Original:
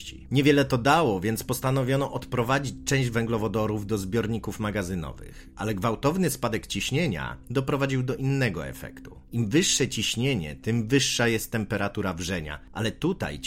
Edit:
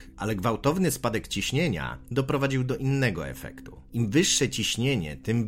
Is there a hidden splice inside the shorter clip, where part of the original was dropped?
no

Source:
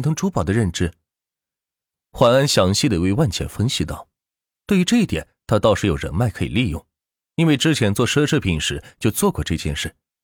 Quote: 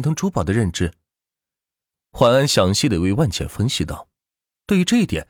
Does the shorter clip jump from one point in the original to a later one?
no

